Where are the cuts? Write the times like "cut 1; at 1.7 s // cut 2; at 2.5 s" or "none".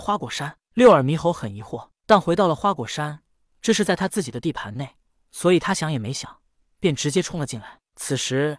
none